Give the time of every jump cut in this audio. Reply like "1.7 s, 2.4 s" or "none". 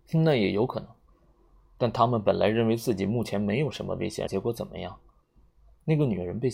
4.3 s